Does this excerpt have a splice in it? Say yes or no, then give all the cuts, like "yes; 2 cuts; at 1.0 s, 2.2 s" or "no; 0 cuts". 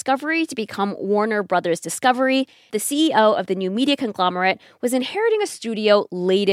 yes; 1 cut; at 2.7 s